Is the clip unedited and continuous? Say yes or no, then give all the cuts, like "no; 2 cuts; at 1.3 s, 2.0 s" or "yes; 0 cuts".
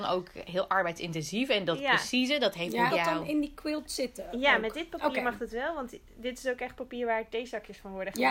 no; 1 cut; at 2.9 s